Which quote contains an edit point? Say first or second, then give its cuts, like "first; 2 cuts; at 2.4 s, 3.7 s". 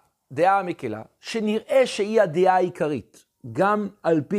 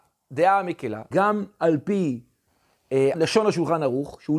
second; 2 cuts; at 1.1 s, 3.1 s